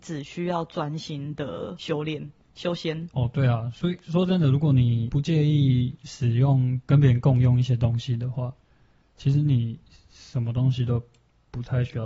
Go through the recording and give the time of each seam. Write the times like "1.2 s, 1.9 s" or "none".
none